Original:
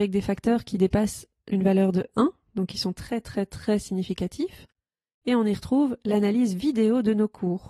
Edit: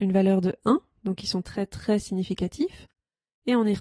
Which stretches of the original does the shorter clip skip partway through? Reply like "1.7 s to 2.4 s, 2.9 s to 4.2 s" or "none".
2.9 s to 3.2 s